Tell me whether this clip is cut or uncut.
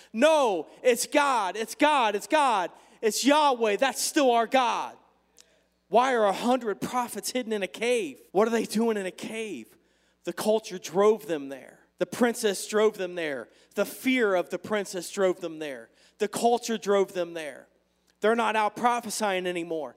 cut